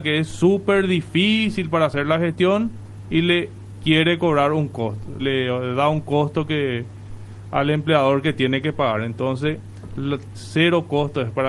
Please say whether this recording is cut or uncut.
cut